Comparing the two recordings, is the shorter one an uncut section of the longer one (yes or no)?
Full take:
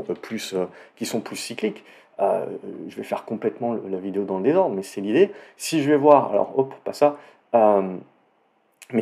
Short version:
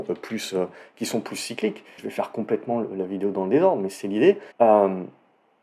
no